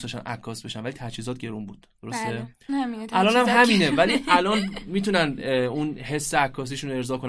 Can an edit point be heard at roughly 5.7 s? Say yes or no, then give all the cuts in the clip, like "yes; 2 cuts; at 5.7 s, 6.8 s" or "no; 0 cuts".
no; 1 cut; at 2.7 s